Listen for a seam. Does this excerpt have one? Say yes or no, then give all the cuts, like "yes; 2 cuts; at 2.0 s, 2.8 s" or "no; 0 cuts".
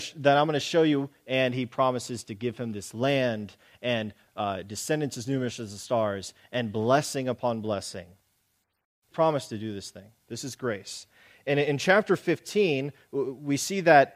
yes; 1 cut; at 9.1 s